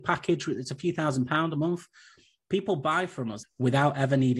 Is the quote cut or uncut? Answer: cut